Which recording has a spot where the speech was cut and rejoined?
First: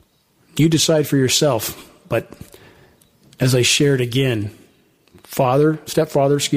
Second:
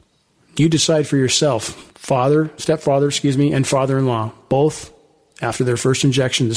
second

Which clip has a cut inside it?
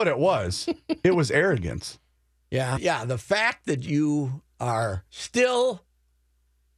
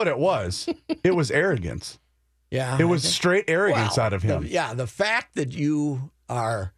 first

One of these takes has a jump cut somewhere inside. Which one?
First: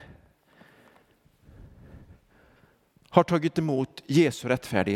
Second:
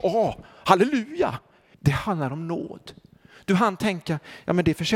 second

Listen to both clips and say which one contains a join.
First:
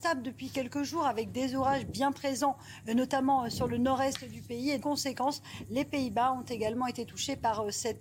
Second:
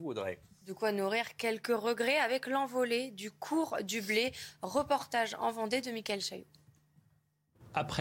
first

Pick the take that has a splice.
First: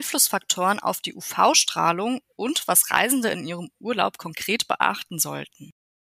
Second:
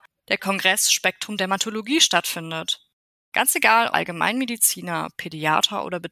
second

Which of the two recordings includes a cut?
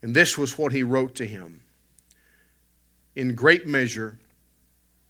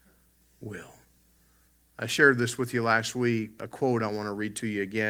second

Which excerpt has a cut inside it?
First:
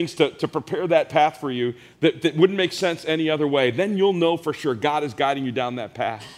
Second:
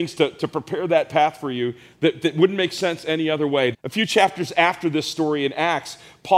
second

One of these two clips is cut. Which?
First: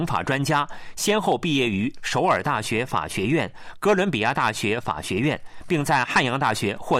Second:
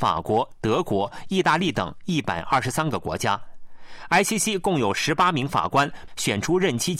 second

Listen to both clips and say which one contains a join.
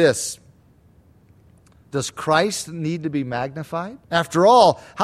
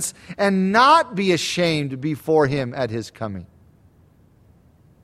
first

